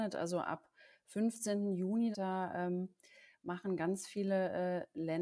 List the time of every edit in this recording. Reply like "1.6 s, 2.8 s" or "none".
2.1 s